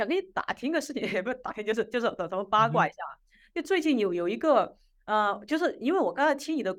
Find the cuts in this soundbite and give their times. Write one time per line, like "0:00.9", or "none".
none